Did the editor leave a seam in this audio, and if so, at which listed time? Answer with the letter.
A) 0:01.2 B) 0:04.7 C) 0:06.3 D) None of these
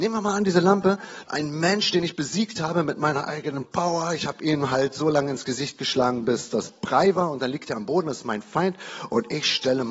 A